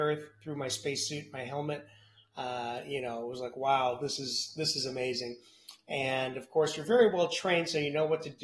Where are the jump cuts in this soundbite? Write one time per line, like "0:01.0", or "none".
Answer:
none